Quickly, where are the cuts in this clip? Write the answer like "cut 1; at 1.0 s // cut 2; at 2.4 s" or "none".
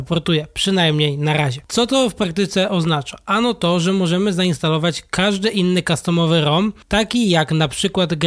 none